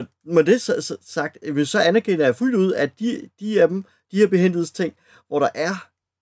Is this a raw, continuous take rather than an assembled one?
yes; 0 cuts

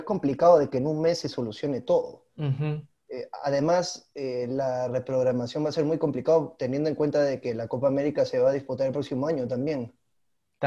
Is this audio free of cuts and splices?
yes; 0 cuts

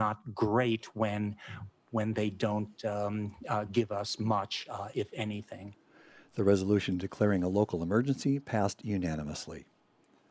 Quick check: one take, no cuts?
yes; 0 cuts

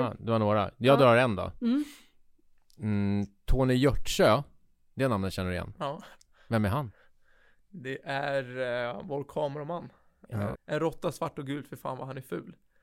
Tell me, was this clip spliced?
yes; 1 cut; at 10.5 s

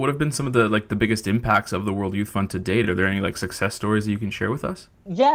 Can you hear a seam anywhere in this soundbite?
no; 0 cuts

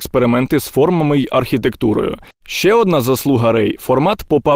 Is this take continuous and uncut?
no; 1 cut; at 2.3 s

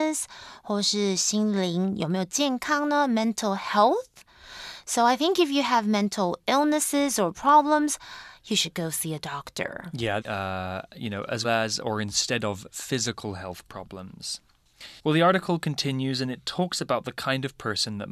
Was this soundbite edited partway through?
yes; 3 cuts; at 10.2 s, 11.4 s, 15.0 s

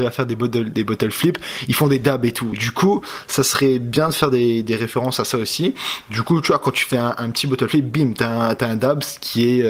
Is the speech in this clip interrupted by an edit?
no; 0 cuts

